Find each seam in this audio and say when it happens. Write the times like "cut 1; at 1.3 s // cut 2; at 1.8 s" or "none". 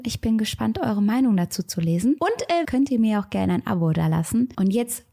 cut 1; at 2.6 s